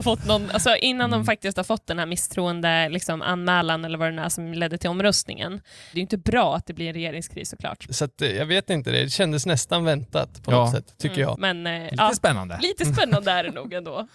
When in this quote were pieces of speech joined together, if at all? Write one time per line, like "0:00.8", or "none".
0:05.9
0:07.9
0:11.3